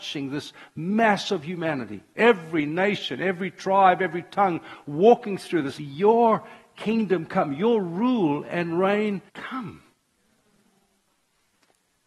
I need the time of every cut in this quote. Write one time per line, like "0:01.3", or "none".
0:05.8
0:09.3